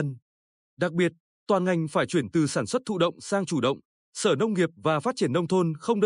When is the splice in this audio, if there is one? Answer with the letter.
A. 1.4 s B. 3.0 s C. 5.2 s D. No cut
A